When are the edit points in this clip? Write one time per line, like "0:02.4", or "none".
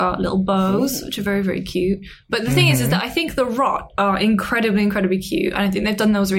none

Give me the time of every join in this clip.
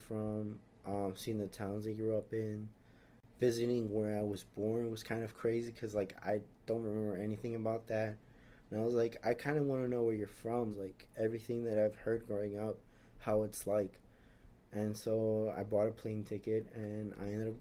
0:08.7
0:10.7

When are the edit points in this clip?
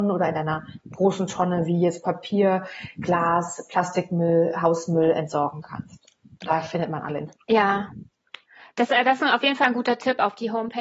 none

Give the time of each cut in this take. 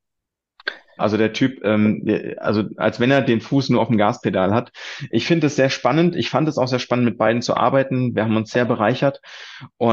0:01.0

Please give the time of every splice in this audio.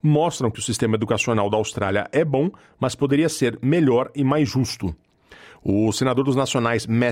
none

